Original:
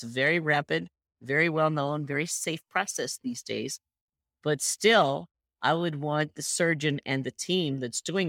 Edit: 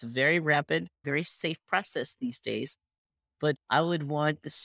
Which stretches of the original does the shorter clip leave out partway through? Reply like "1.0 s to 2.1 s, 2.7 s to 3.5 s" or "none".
1.0 s to 2.1 s, 4.6 s to 5.5 s